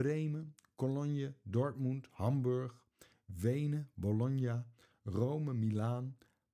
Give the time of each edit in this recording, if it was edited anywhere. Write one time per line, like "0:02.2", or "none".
none